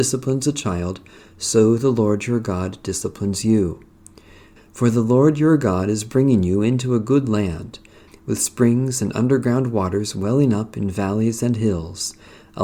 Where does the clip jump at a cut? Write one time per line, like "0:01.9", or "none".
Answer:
0:04.6
0:08.1